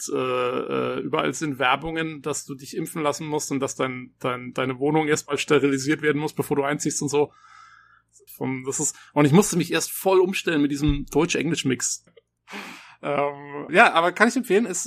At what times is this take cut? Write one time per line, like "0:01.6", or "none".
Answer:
0:08.3
0:12.1
0:13.7